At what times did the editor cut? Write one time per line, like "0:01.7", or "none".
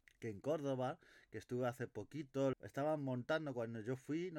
0:02.5